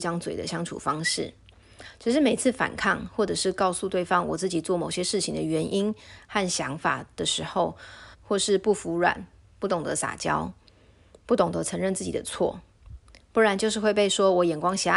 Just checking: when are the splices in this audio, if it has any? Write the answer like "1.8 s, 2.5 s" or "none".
8.1 s